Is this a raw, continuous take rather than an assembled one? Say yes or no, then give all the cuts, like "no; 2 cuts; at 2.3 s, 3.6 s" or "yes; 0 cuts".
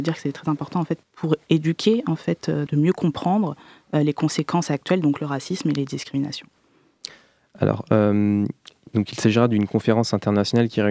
no; 2 cuts; at 1.0 s, 2.7 s